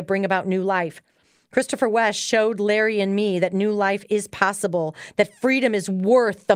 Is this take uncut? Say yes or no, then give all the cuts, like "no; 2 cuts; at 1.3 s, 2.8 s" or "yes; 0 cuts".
yes; 0 cuts